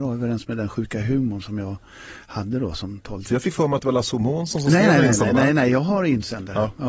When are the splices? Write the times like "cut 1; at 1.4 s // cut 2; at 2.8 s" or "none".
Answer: cut 1; at 3.3 s